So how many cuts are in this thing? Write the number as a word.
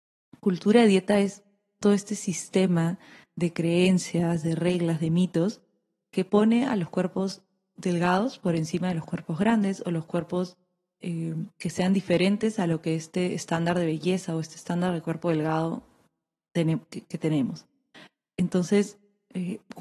one